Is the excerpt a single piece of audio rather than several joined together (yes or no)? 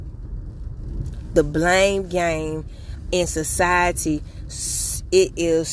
yes